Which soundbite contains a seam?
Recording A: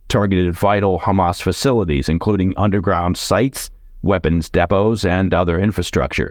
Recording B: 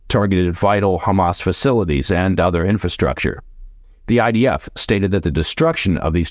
B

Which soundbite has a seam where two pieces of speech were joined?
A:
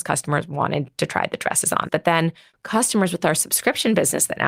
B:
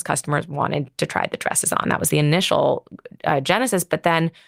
A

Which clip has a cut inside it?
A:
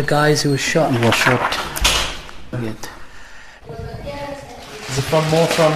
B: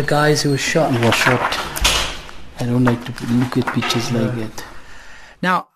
A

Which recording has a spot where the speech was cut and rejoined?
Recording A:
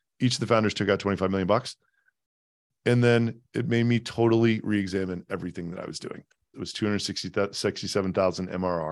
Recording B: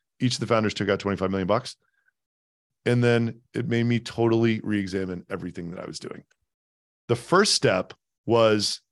A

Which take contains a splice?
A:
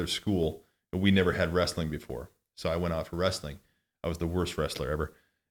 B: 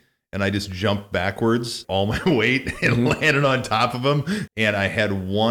B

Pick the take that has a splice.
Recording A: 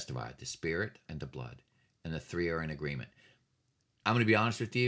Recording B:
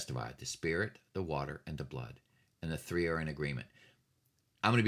A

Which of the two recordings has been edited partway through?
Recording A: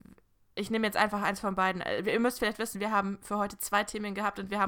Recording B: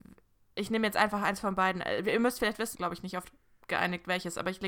B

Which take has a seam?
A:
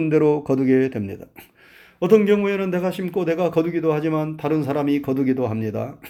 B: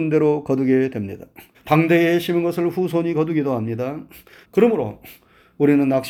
B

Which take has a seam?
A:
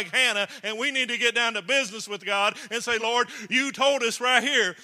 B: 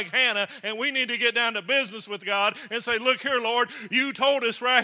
A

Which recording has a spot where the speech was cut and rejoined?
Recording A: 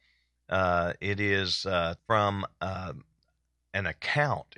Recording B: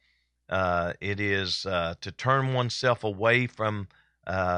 A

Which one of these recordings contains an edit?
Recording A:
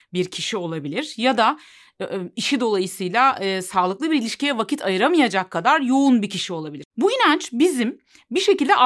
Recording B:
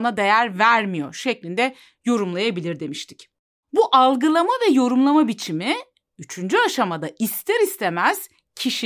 A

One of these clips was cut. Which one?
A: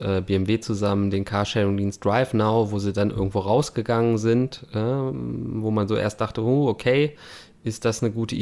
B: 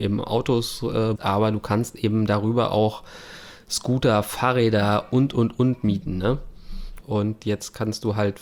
B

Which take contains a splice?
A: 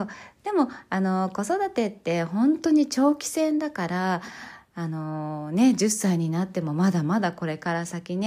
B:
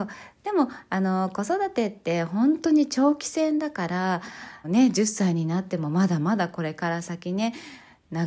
B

